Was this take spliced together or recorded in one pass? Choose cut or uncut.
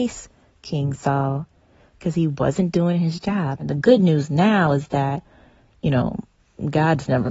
cut